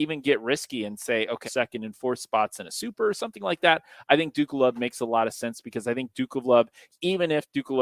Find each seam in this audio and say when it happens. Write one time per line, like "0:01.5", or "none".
0:01.4